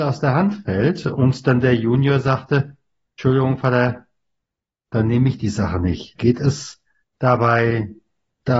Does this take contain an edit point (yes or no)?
yes